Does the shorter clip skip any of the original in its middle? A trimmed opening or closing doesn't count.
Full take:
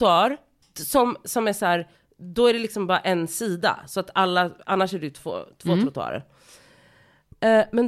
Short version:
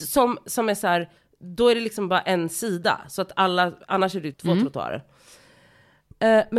yes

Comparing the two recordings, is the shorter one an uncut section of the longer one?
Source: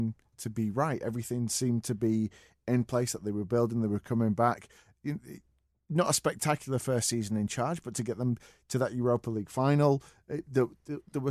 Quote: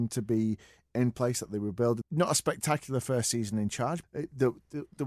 no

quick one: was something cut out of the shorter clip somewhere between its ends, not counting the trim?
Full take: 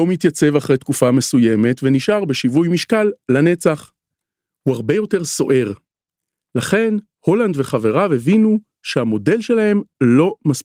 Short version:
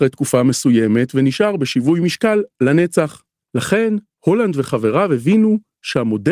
yes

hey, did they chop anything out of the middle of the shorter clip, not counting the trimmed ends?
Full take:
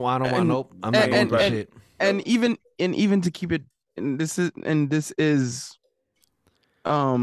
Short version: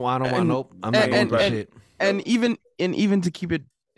no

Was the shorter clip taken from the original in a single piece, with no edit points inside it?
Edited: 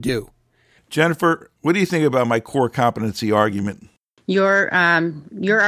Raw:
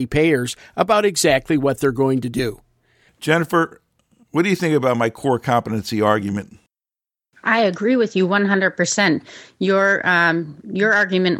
no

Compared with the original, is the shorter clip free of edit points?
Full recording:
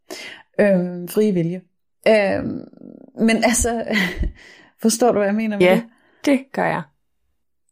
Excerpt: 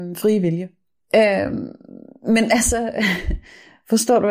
yes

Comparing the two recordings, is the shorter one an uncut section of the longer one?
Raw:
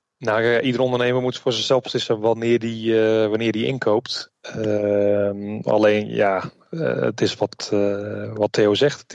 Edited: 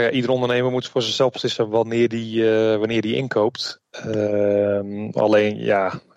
yes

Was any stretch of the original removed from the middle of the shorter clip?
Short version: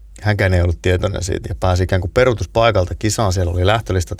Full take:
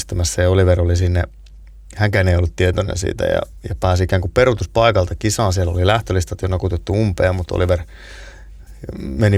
yes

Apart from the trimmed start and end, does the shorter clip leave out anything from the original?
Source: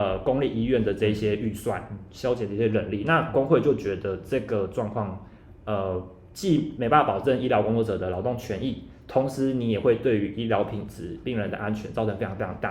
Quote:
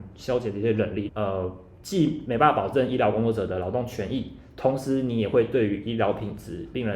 yes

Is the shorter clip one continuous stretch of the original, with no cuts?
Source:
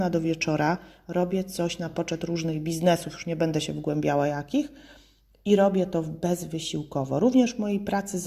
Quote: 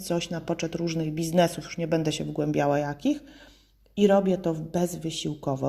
yes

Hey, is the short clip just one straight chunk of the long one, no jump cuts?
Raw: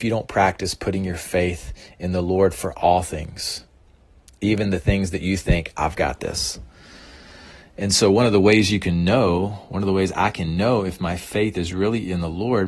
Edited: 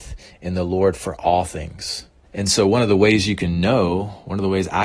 no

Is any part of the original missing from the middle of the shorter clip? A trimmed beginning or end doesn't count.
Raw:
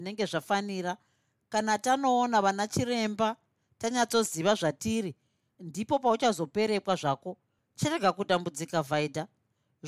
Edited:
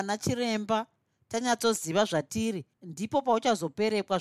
yes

